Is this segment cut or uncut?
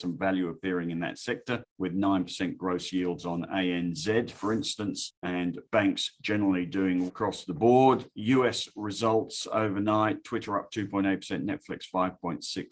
cut